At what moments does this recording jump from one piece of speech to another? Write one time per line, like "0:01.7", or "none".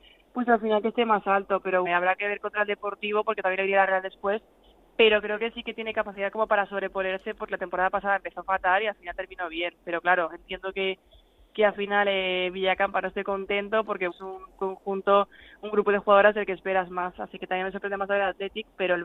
0:01.9
0:14.1